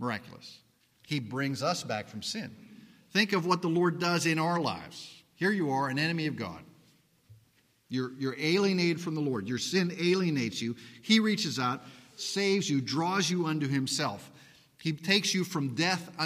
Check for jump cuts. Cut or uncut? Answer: cut